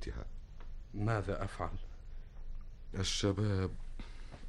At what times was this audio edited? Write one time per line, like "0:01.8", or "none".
0:02.9